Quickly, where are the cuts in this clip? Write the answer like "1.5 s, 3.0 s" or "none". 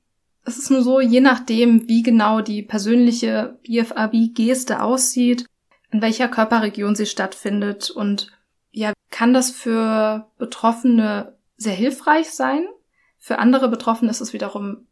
8.9 s